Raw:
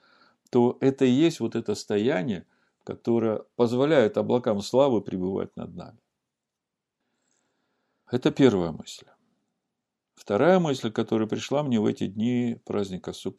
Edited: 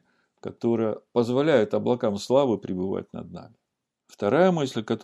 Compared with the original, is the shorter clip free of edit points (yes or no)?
no